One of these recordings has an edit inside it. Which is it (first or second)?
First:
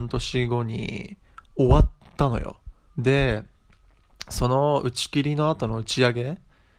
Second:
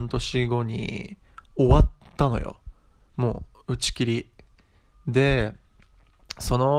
first